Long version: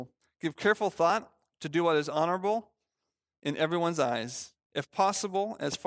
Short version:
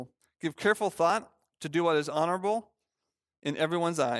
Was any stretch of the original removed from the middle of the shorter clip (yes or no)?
no